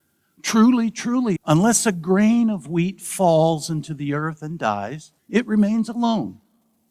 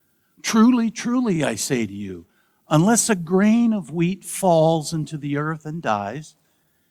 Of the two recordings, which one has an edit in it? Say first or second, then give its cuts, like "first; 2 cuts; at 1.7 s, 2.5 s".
first; 2 cuts; at 1.4 s, 5.2 s